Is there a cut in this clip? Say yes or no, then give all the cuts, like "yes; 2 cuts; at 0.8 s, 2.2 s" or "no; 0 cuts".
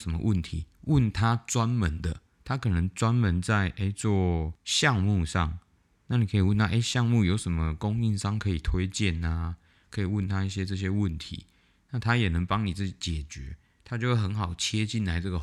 no; 0 cuts